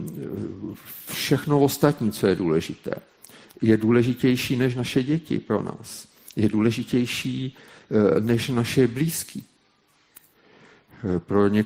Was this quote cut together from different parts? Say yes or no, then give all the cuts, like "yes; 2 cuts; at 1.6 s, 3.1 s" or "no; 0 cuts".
no; 0 cuts